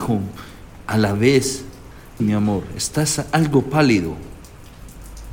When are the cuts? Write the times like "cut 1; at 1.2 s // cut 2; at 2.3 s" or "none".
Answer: cut 1; at 2.2 s